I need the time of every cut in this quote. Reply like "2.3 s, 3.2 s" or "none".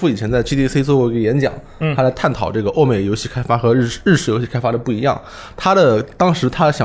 none